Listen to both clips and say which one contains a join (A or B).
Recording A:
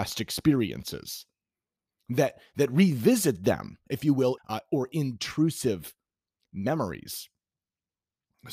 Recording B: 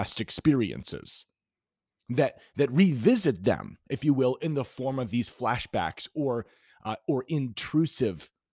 A